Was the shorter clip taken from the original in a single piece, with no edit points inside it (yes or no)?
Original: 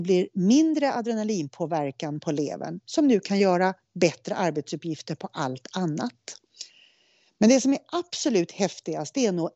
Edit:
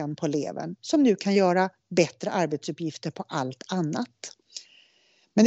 yes